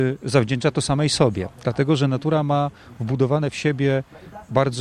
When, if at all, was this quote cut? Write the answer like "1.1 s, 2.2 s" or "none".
none